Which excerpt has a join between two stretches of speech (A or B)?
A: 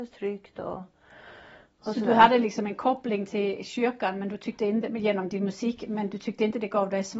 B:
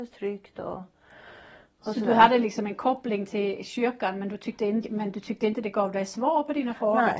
B